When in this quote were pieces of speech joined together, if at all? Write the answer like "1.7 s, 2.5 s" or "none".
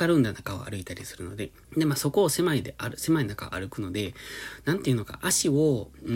1.6 s